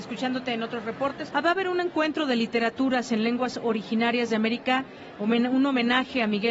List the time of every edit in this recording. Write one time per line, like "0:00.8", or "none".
0:01.3